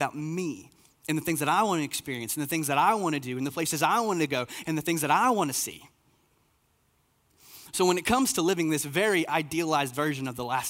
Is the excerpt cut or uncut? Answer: uncut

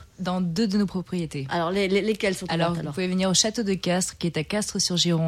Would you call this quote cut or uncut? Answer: uncut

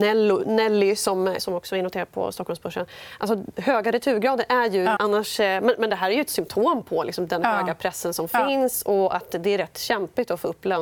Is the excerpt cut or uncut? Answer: cut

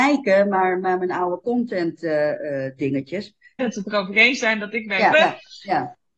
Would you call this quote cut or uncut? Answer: cut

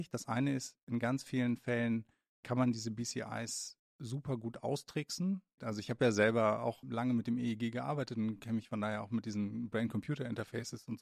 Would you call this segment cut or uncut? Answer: cut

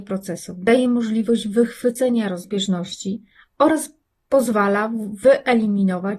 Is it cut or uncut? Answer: uncut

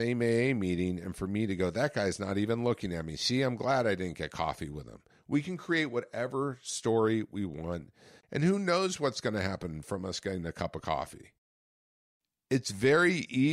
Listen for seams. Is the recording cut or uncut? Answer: cut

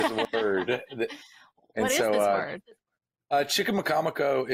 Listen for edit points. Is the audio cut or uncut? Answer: uncut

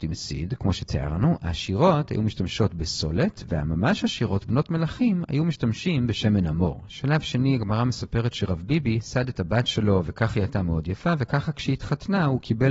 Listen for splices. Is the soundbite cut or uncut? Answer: cut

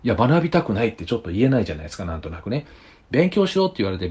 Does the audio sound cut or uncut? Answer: uncut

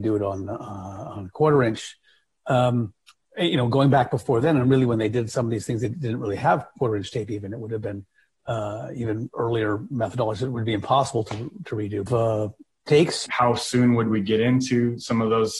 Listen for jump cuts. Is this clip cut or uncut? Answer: cut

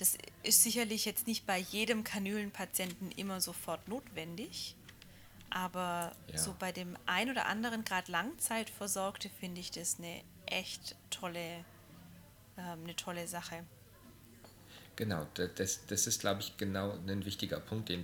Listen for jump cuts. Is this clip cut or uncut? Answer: uncut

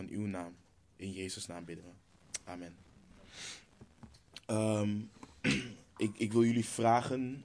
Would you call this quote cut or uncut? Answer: uncut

